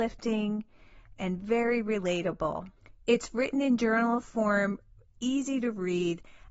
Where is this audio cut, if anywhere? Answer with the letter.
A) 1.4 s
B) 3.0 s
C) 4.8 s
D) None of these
D